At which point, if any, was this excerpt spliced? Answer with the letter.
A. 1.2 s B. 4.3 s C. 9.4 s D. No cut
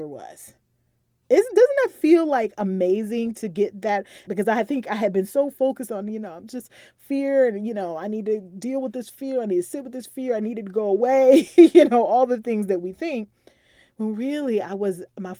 B